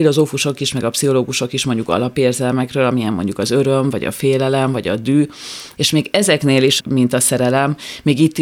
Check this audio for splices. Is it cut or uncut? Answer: cut